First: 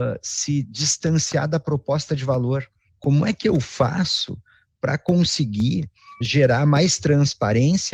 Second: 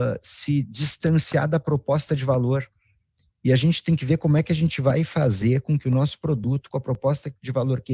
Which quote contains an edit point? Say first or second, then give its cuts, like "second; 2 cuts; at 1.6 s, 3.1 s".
first; 2 cuts; at 2.9 s, 6.2 s